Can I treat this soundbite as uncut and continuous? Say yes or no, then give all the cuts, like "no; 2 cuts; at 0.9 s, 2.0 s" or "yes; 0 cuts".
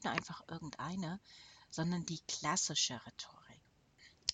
yes; 0 cuts